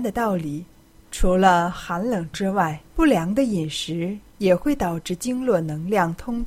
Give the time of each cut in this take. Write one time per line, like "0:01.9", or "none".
0:01.0
0:02.9